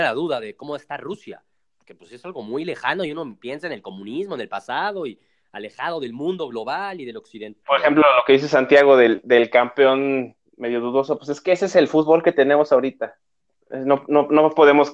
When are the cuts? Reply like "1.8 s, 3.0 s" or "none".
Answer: 7.6 s